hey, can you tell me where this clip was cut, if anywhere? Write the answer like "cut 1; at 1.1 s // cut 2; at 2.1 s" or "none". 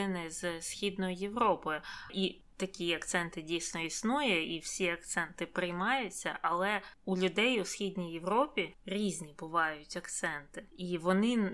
none